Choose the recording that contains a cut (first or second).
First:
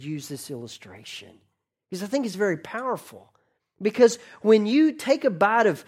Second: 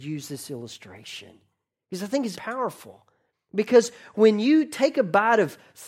second